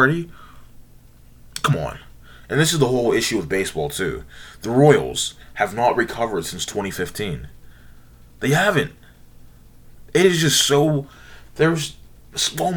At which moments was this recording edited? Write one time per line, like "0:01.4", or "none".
none

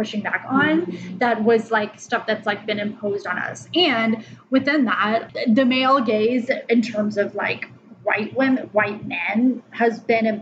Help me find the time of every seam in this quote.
0:05.3

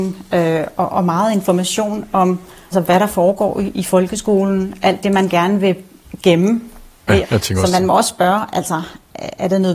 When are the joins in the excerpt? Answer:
0:02.7
0:07.2

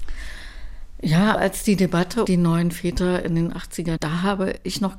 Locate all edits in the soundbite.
0:02.3
0:04.0

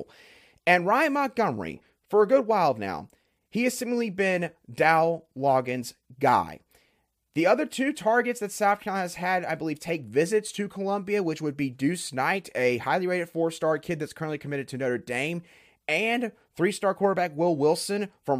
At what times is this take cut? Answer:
none

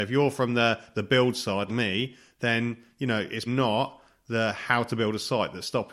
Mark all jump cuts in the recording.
0:01.7
0:03.5

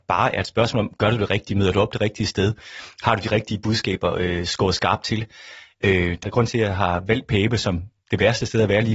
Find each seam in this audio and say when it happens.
0:06.2

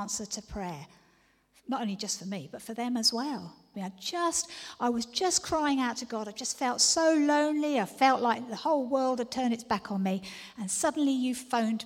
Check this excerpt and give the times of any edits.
0:03.7

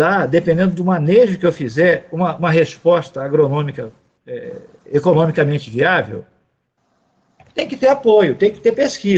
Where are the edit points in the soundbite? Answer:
none

